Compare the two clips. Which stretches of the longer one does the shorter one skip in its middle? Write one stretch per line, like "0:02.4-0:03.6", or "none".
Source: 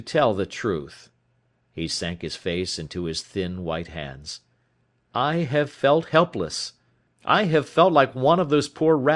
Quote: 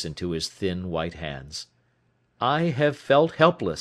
none